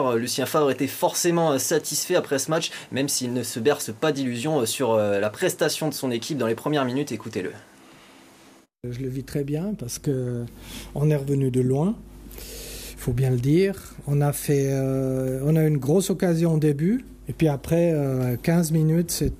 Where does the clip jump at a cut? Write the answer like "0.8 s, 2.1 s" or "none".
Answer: none

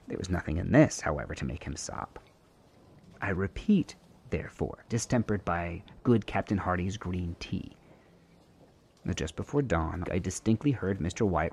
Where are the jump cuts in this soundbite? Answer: 4.9 s, 10.0 s

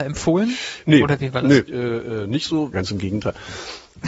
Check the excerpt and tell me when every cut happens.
1.7 s, 2.7 s

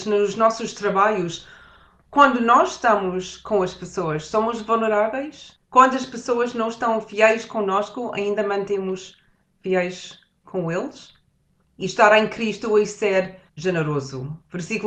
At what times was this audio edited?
5.6 s, 11.6 s, 13.5 s

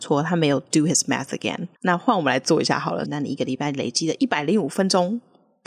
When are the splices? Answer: 1.7 s, 3.0 s

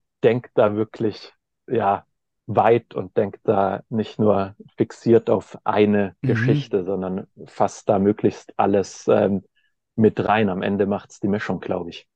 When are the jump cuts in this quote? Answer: none

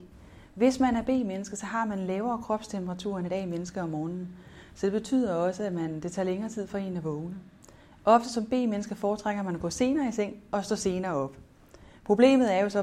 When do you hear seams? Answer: none

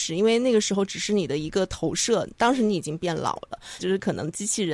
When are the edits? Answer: 3.8 s

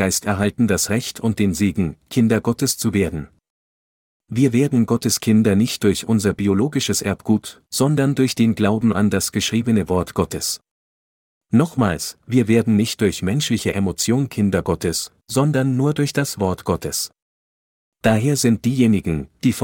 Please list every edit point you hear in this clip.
none

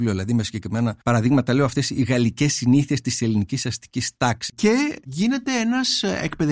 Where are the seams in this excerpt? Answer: 1.0 s, 4.5 s

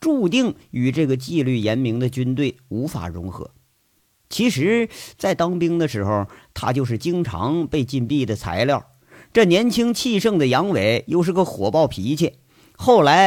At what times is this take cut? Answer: none

